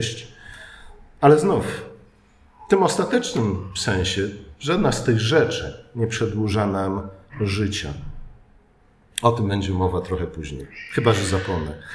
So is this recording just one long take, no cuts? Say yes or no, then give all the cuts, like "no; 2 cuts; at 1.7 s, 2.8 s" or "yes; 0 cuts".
yes; 0 cuts